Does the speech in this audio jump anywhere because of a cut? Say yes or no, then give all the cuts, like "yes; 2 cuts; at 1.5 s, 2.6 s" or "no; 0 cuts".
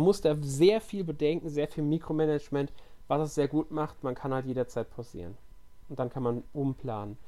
no; 0 cuts